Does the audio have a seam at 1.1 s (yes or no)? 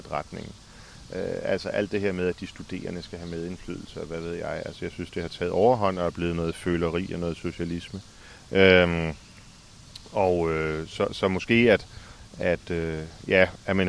no